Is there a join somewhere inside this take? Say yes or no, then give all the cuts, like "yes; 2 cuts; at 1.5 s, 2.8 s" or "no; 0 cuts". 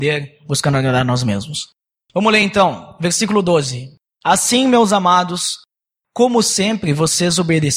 no; 0 cuts